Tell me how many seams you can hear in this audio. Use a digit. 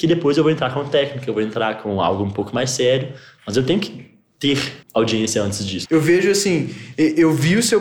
2